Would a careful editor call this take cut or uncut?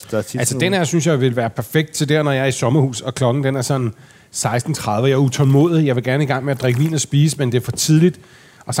uncut